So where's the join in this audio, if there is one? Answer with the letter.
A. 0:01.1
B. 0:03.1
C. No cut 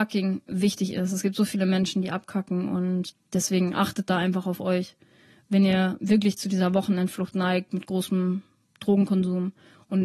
B